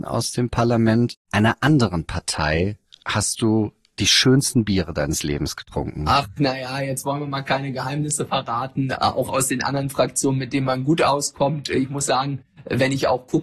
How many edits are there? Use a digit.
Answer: 1